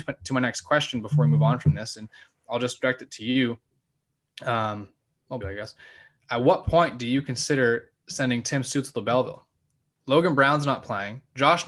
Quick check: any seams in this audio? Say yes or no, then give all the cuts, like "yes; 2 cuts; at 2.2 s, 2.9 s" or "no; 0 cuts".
yes; 1 cut; at 5.4 s